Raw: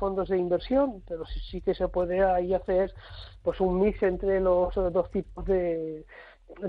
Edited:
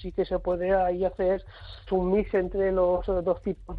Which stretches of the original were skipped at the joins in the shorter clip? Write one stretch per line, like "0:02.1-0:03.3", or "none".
0:03.4-0:03.6

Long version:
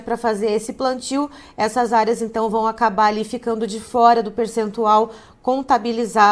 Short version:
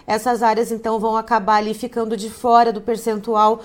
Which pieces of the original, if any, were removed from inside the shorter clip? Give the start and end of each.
none

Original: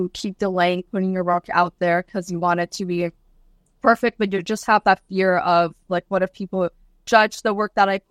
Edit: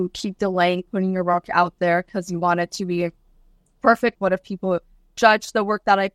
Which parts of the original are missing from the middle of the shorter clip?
0:04.1-0:06.0

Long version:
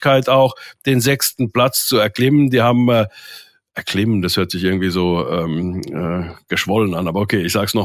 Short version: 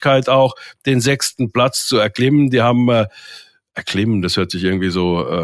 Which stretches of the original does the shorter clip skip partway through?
none

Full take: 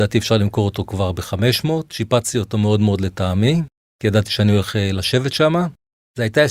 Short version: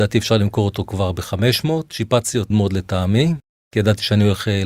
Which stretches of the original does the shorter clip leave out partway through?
0:02.5-0:02.8

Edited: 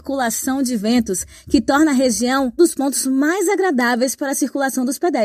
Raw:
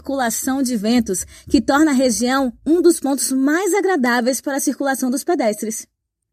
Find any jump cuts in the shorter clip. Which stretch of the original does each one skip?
0:02.6-0:02.8

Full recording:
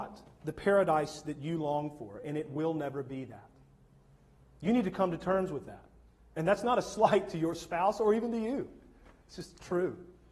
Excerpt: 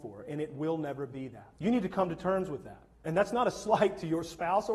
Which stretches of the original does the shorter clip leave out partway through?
0:03.5-0:04.6
0:05.9-0:06.2

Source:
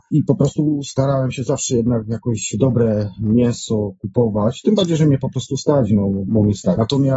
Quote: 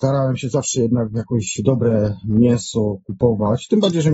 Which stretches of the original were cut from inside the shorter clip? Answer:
none

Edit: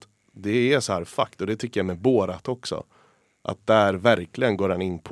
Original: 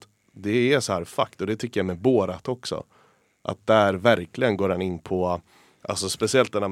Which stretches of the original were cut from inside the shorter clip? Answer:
none

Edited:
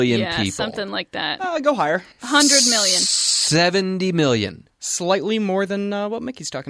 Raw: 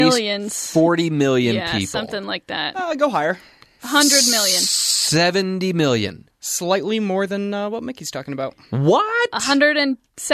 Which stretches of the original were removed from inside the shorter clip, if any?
0:03.5-0:03.7

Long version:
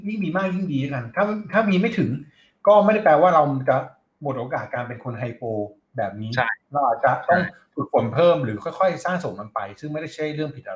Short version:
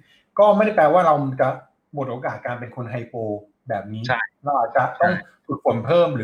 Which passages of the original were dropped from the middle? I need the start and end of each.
none

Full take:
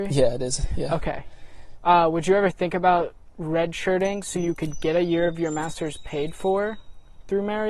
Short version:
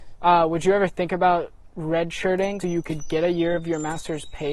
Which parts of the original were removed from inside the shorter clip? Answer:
0:04.2-0:04.3

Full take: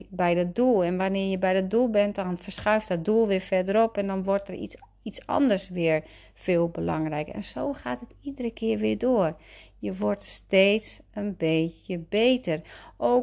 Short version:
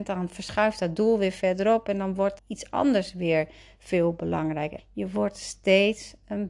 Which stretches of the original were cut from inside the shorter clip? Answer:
0:04.5-0:04.9
0:07.3-0:09.6

